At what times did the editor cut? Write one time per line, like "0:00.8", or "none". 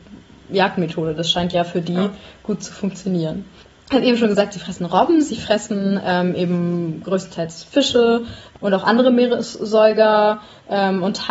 none